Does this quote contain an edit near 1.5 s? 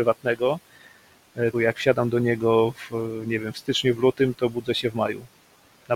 yes; 1 cut; at 1.5 s

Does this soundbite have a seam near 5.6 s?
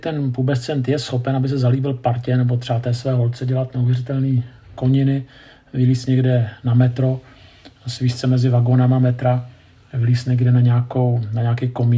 no; 0 cuts

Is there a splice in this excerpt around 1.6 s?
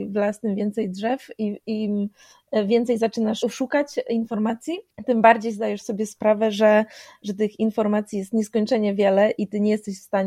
no; 1 cut; at 3.4 s

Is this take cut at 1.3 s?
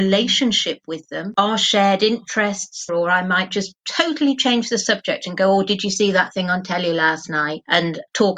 no; 1 cut; at 2.9 s

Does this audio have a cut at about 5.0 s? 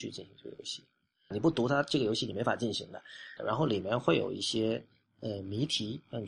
no; 2 cuts; at 1.3 s, 3.4 s

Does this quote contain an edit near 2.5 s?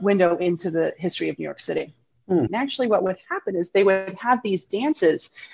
yes; 1 cut; at 2.5 s

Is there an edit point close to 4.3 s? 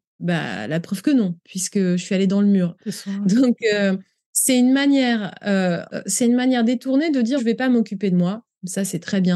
no; 3 cuts; at 2.8 s, 5.9 s, 7.4 s

